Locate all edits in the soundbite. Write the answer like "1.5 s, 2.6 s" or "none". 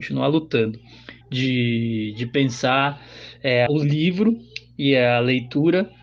1.2 s, 3.7 s